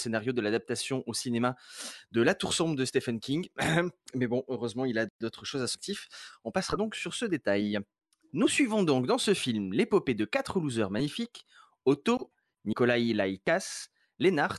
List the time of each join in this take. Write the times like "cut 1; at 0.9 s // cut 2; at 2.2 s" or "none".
none